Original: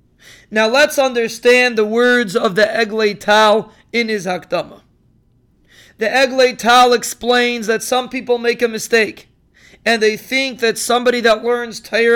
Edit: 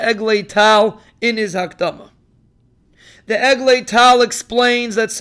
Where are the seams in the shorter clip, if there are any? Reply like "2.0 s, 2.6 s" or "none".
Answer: none